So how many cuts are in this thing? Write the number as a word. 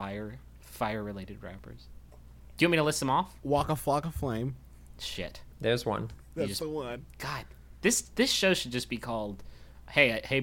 zero